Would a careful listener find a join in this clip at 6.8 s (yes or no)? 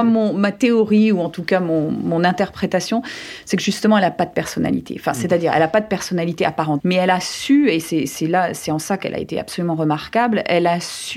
yes